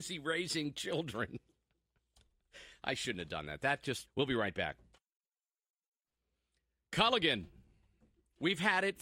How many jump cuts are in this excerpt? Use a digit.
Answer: 1